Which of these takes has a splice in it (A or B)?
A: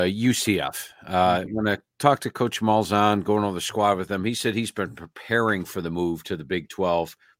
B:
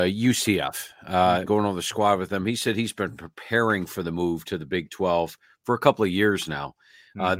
B